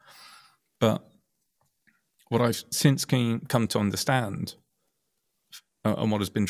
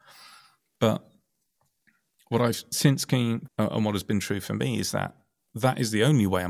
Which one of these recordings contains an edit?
second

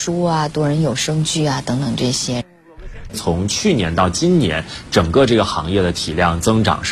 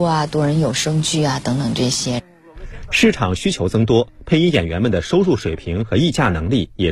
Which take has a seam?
first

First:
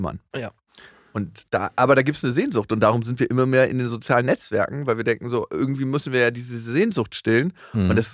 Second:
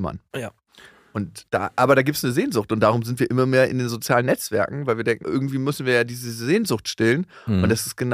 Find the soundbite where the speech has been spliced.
second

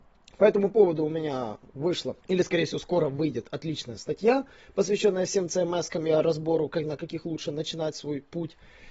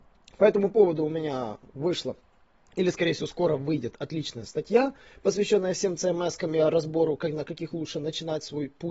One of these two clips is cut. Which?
first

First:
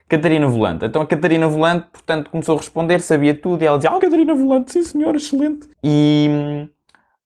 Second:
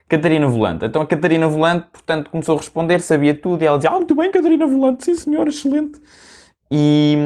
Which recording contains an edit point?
first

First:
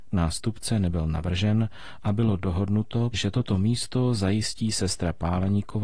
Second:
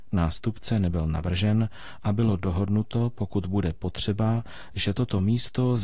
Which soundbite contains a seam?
first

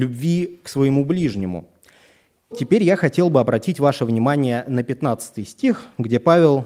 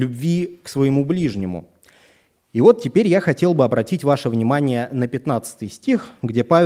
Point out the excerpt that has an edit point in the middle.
first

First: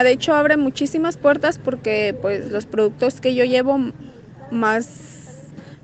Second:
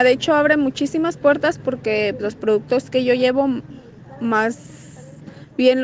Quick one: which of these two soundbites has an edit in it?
second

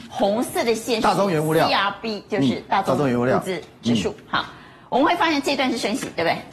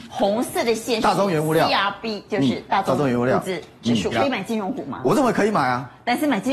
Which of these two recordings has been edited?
second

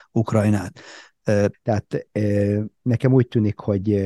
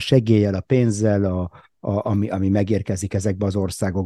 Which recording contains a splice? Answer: first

